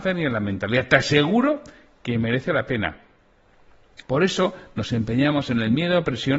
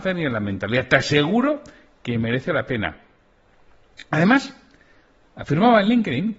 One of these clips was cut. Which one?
first; 1 cut; at 4.0 s

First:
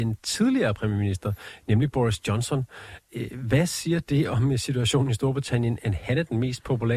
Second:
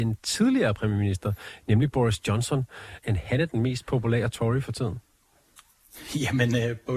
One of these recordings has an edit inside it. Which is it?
second; 1 cut; at 3.0 s

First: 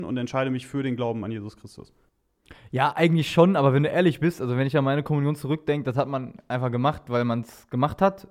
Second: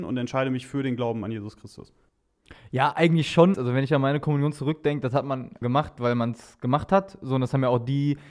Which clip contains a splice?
second; 2 cuts; at 3.5 s, 5.6 s

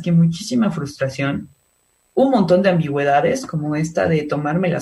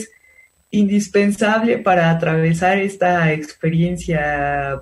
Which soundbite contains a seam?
first; 1 cut; at 2.1 s

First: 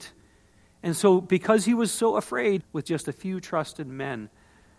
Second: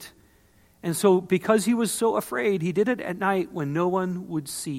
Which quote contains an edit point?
first; 1 cut; at 2.6 s

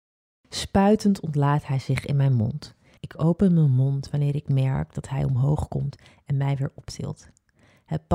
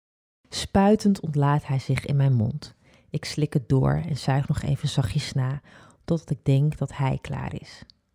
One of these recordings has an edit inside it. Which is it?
first; 1 cut; at 3.0 s

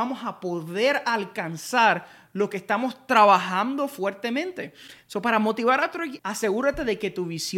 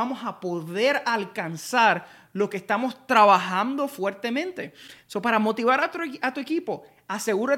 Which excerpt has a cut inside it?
first; 1 cut; at 6.2 s

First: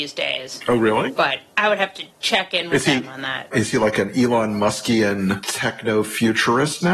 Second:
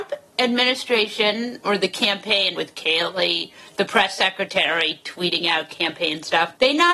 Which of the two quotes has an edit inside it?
second; 1 cut; at 2.5 s

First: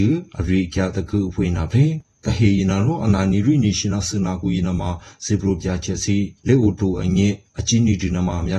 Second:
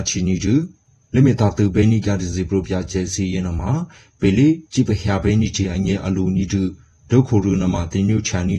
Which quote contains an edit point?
first; 1 cut; at 6.4 s

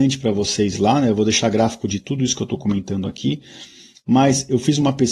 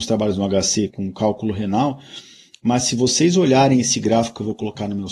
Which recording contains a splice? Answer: second; 1 cut; at 0.9 s

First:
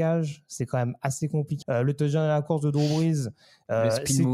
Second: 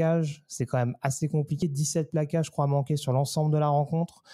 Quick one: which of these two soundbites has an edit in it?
first; 1 cut; at 1.6 s

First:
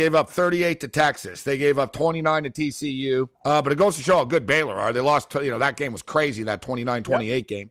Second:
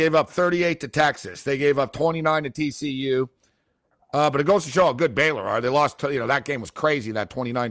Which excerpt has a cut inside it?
first; 1 cut; at 3.3 s

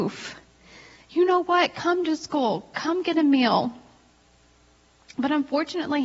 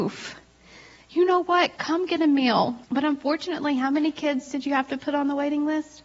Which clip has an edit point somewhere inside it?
second; 2 cuts; at 1.8 s, 2.8 s

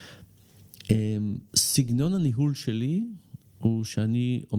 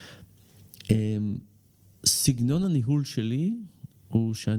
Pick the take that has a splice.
first; 1 cut; at 1.5 s

